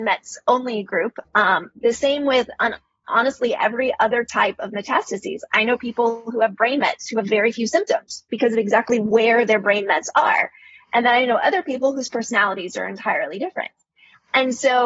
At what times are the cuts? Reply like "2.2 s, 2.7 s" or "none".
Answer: 1.2 s